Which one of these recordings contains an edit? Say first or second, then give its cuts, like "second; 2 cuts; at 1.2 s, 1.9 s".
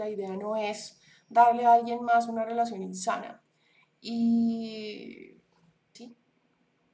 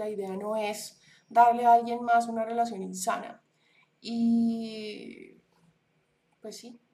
first; 1 cut; at 6.0 s